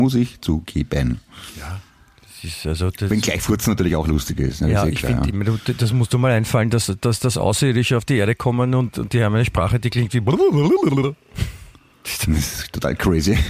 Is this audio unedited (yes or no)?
no